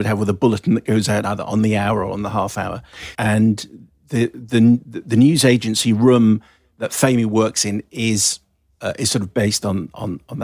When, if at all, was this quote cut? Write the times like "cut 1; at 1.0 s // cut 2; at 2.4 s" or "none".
cut 1; at 3.1 s